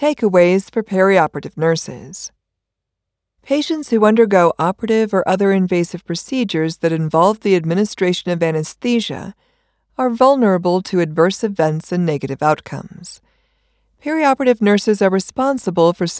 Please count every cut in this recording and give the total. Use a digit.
0